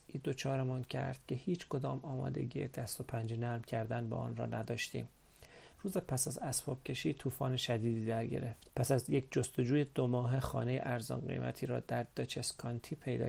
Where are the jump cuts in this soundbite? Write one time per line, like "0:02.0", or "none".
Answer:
0:05.7
0:08.7